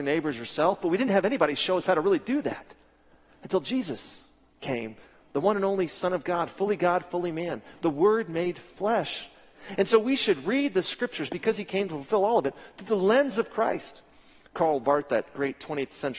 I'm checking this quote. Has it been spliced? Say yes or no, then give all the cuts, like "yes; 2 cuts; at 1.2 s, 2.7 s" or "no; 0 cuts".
no; 0 cuts